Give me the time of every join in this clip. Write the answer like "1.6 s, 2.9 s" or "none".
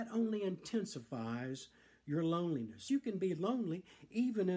2.9 s